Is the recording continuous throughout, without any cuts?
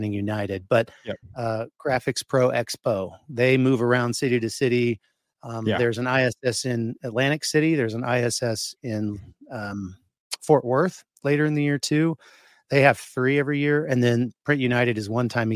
no; 1 cut; at 1.2 s

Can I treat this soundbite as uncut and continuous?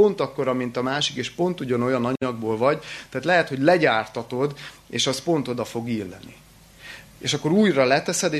yes; 0 cuts

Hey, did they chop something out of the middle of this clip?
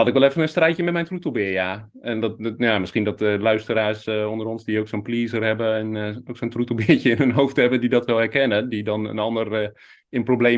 no; 0 cuts

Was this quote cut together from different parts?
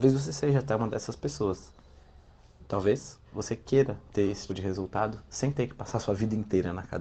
yes; 1 cut; at 4.5 s

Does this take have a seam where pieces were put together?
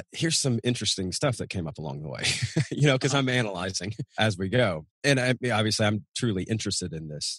no; 0 cuts

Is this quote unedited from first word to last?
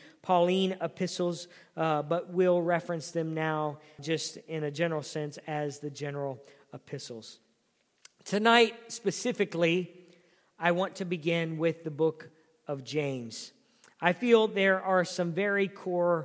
no; 1 cut; at 4.0 s

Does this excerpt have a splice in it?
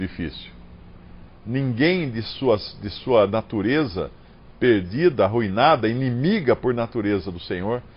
yes; 1 cut; at 1.3 s

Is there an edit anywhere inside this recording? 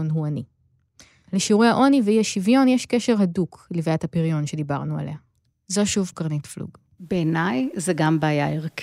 no; 0 cuts

